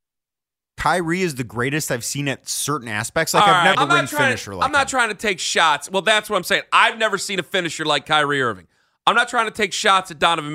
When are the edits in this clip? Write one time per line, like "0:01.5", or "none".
0:03.7